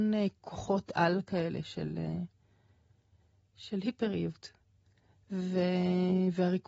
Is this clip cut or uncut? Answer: uncut